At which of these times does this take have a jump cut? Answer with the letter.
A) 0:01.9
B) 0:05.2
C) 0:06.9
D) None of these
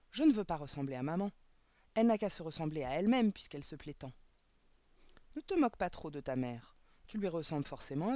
D